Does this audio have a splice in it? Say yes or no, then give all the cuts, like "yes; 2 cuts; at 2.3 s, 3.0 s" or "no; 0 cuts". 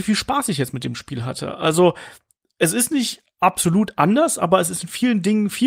no; 0 cuts